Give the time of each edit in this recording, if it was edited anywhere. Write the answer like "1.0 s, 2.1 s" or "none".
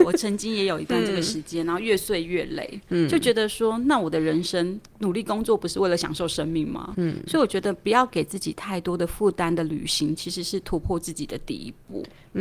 6.9 s